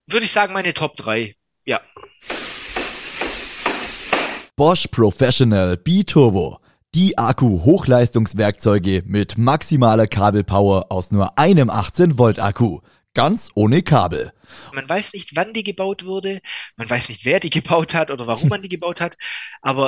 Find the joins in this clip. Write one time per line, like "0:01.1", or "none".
0:14.7